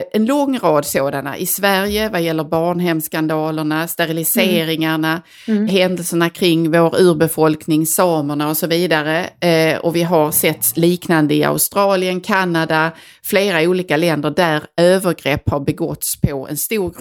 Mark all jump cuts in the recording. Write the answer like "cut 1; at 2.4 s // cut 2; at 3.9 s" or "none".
cut 1; at 5.7 s